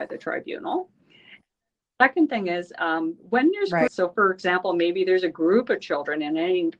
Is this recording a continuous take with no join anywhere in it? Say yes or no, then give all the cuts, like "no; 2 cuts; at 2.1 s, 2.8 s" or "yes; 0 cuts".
no; 1 cut; at 3.9 s